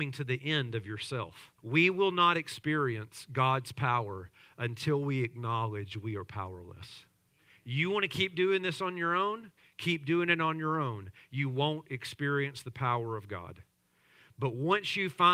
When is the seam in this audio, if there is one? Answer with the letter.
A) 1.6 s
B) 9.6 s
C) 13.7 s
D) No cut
A